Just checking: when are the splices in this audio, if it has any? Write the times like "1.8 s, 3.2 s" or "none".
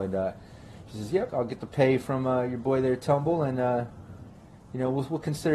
1.3 s